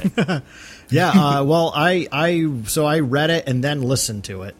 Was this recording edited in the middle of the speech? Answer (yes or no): no